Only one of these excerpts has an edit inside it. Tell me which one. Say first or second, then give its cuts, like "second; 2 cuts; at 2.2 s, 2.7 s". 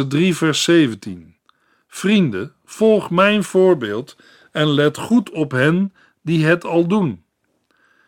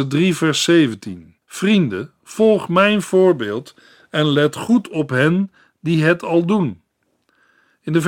second; 1 cut; at 1.4 s